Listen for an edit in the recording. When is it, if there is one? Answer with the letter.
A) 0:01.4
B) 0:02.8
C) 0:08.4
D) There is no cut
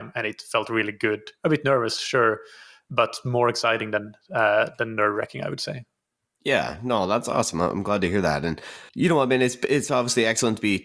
D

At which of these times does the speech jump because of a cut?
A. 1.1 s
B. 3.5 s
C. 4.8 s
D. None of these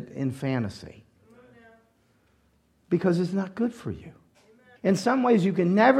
C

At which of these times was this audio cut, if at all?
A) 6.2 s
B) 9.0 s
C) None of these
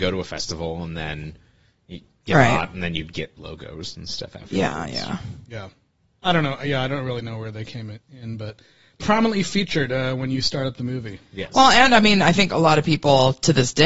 B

